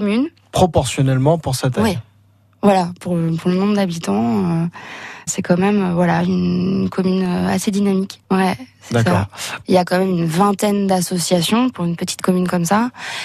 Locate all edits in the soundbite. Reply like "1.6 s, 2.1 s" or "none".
5.3 s, 8.2 s, 9.6 s